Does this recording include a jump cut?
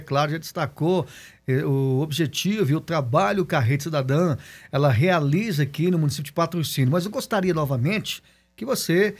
no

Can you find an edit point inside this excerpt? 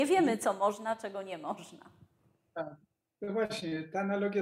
no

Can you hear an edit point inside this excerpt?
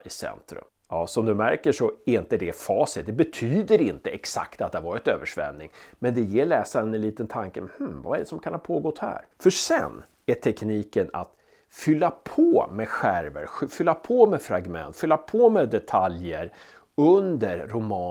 no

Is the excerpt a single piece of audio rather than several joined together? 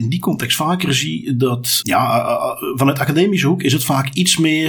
no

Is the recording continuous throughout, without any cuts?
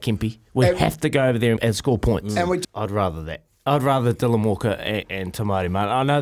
no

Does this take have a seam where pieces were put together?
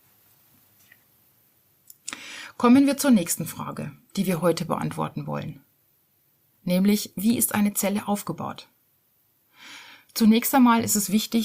no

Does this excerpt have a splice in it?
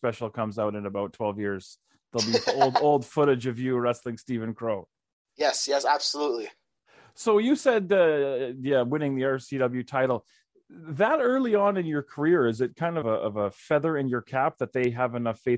yes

